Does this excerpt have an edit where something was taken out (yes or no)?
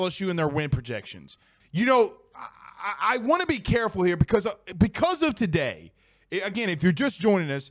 yes